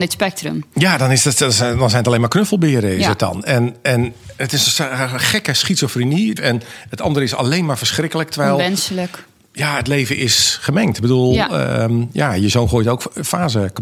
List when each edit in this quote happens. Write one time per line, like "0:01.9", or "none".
0:06.4